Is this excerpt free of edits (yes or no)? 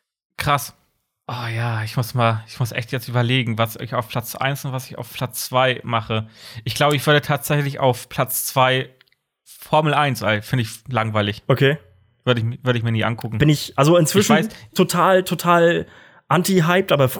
yes